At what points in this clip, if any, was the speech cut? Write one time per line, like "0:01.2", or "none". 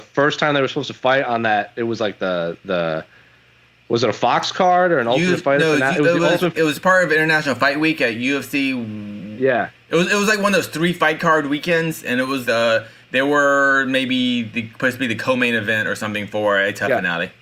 0:06.5
0:12.4